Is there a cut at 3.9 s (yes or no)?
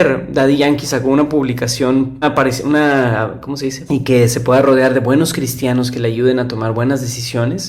yes